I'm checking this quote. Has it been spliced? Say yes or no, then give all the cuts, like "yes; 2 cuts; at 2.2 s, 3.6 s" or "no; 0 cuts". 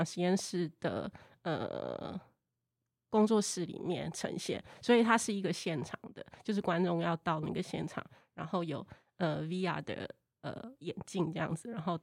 no; 0 cuts